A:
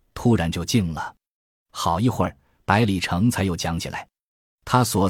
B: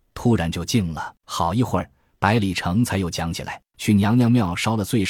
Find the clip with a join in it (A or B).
B